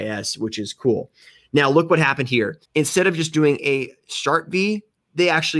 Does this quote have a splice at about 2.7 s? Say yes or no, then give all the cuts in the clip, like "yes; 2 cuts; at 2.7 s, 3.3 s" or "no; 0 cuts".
yes; 1 cut; at 2.7 s